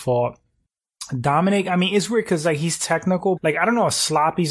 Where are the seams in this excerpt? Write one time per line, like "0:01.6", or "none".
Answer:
0:03.4